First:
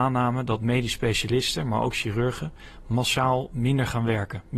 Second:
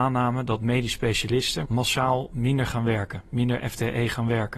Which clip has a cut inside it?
second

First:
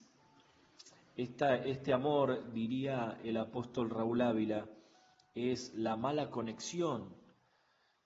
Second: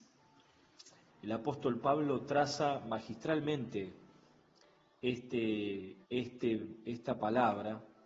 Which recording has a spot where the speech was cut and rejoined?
second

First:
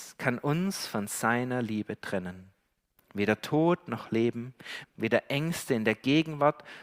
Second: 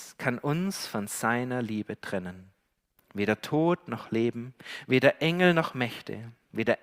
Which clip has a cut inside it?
first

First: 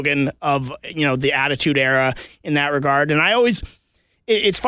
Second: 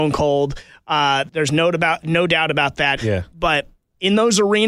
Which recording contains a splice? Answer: second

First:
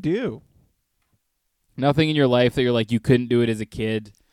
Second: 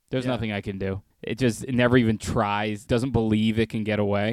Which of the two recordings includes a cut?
second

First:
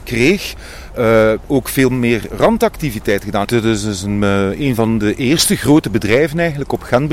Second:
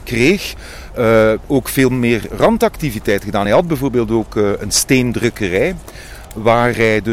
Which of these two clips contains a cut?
first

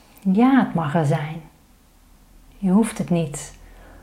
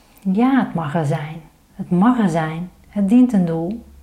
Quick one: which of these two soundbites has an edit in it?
second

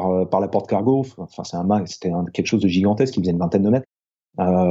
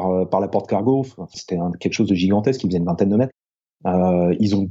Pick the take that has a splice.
second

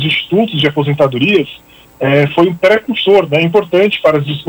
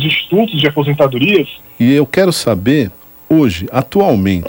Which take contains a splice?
second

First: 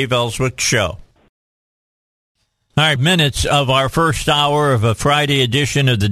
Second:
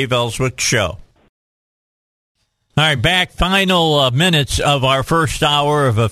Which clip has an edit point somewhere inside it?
first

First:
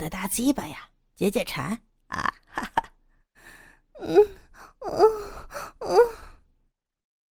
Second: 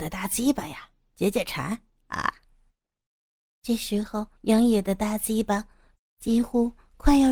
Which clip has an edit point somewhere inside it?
second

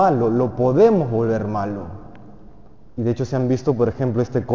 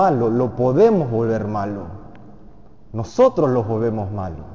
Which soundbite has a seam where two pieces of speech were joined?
first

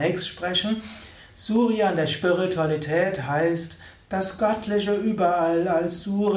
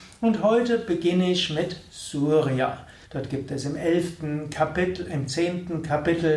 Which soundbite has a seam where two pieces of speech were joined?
second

